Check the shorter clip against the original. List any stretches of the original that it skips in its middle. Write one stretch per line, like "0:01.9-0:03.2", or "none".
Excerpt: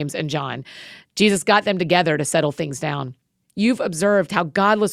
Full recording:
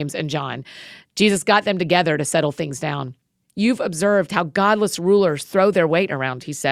none